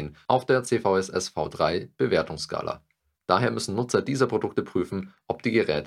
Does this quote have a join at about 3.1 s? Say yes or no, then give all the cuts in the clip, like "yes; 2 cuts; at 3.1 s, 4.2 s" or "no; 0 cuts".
yes; 1 cut; at 3.1 s